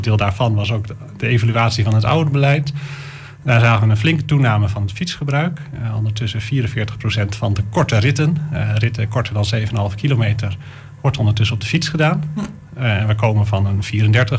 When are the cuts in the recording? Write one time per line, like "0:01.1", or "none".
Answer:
none